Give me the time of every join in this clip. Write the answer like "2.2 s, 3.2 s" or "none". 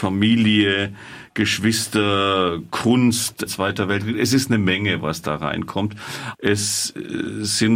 3.5 s, 6.3 s

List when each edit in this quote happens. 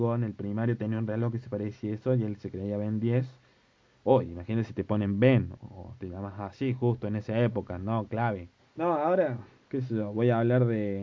5.6 s, 8.6 s

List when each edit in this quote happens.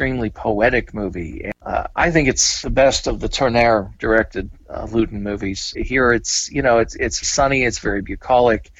5.7 s, 7.2 s

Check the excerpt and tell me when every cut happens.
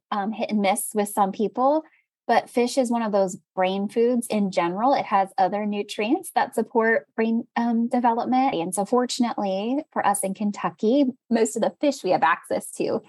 8.5 s

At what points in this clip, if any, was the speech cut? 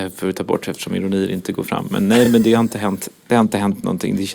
none

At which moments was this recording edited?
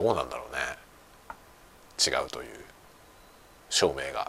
1.9 s

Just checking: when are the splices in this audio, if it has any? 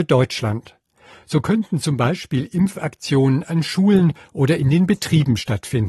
none

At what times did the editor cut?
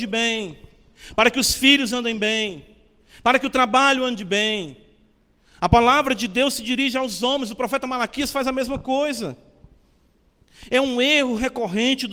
none

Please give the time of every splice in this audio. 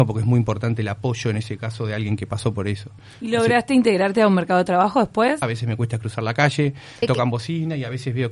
5.4 s, 7.0 s

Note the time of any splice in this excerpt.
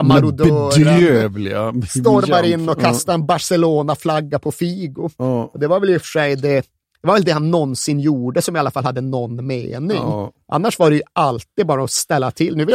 none

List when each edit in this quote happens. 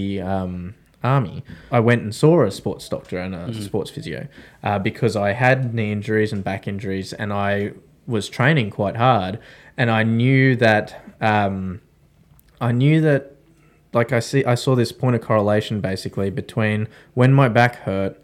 1.7 s

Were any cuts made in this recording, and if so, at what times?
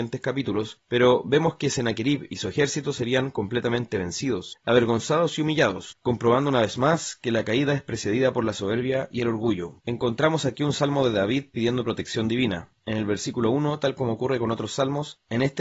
9.8 s

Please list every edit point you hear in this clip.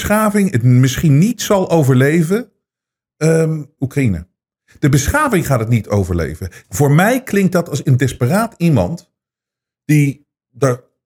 3.8 s, 6.6 s

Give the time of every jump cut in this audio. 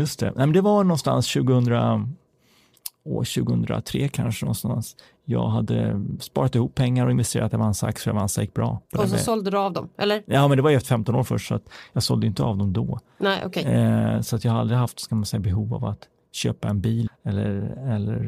8.9 s, 17.1 s

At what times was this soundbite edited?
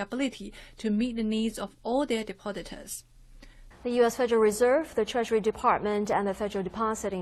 3.7 s

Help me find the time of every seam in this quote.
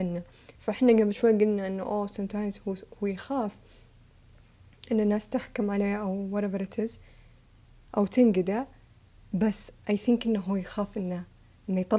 none

